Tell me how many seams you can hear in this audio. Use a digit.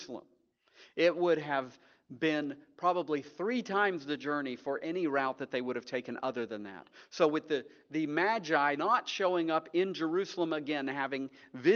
1